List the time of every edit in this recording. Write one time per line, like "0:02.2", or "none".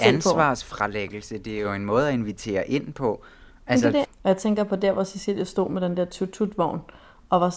0:04.0